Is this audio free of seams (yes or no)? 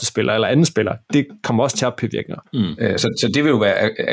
no